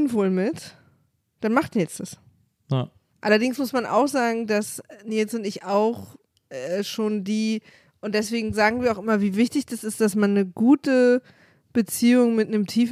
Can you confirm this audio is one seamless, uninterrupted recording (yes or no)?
no